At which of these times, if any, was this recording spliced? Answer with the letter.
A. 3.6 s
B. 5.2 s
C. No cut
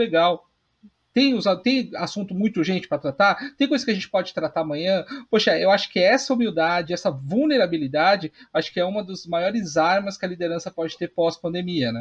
B